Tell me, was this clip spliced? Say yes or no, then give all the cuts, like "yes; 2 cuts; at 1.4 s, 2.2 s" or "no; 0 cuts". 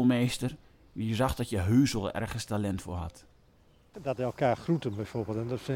yes; 1 cut; at 3.9 s